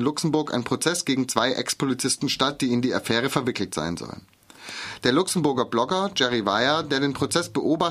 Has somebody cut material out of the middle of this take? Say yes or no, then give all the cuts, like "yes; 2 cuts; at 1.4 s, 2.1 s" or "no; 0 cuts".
no; 0 cuts